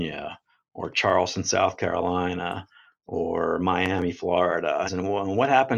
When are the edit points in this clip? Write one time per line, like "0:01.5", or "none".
0:04.9